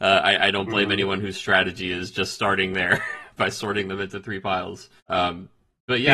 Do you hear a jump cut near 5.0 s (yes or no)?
yes